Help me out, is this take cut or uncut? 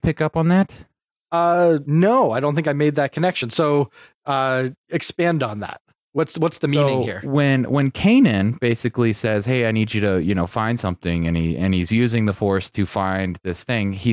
uncut